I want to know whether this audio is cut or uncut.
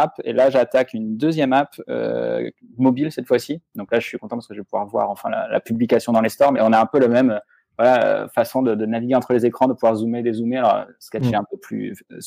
cut